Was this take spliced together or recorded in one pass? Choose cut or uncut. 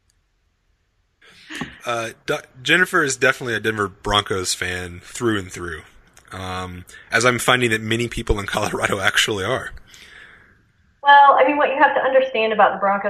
cut